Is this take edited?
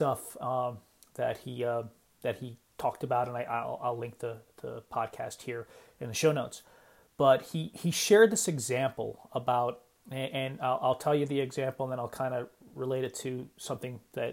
no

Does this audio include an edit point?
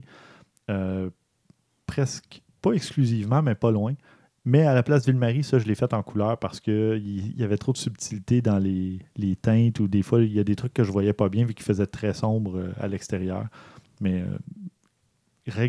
no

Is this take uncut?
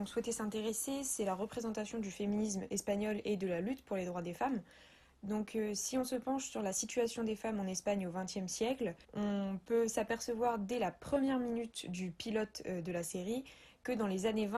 no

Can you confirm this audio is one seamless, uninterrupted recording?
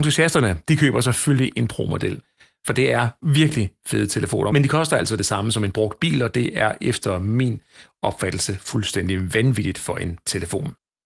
yes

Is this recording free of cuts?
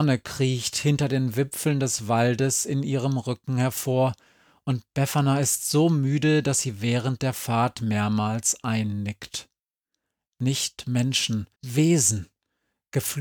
no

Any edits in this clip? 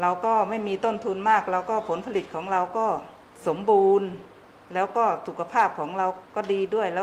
no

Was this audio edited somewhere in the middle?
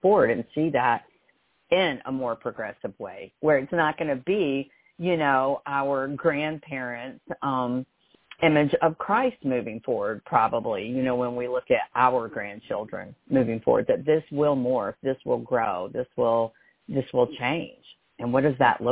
no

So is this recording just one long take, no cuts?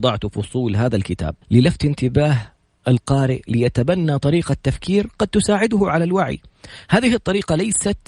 no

